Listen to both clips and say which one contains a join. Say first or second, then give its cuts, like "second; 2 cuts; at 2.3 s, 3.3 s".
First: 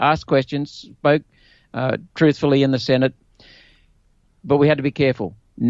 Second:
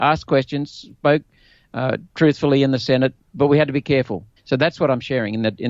second; 2 cuts; at 3.2 s, 4.4 s